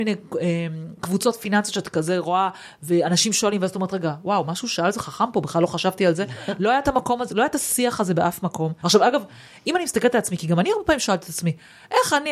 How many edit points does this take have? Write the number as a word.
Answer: one